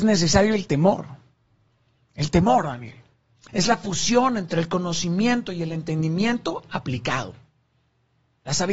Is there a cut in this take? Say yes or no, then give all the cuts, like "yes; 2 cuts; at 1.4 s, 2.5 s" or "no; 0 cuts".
yes; 1 cut; at 3.4 s